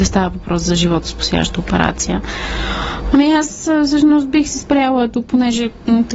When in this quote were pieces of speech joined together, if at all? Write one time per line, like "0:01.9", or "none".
0:03.1